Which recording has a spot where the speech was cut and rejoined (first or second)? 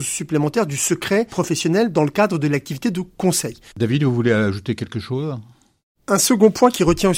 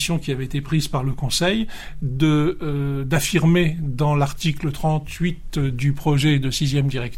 first